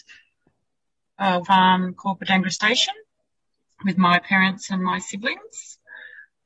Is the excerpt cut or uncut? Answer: cut